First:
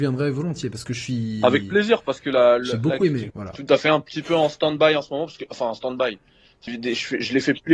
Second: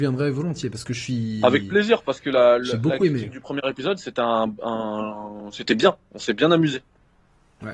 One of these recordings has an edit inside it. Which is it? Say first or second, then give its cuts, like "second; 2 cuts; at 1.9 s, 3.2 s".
first; 2 cuts; at 3.3 s, 6.7 s